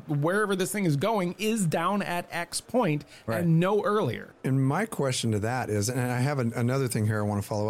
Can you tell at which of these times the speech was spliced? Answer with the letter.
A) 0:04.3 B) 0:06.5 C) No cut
A